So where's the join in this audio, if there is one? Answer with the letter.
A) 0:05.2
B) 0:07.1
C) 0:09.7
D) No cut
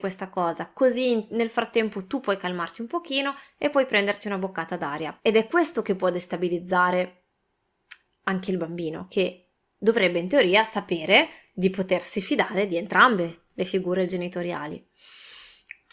A